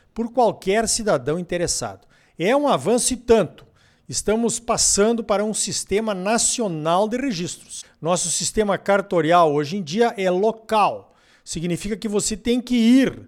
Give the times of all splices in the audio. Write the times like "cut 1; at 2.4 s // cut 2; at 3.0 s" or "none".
none